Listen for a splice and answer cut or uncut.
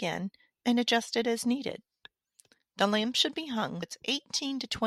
cut